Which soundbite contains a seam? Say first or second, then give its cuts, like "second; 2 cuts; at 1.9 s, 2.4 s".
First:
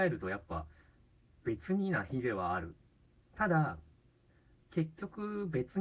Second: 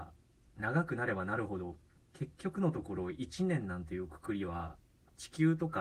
second; 1 cut; at 2.0 s